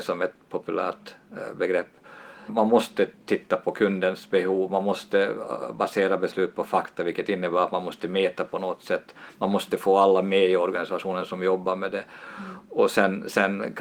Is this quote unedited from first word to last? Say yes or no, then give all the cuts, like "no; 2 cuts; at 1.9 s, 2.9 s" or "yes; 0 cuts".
no; 1 cut; at 2.5 s